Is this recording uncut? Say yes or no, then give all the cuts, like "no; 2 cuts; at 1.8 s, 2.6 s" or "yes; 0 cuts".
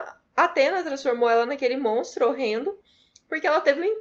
yes; 0 cuts